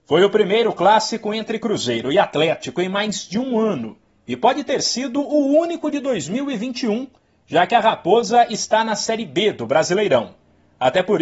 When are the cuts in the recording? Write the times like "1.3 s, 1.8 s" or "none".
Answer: none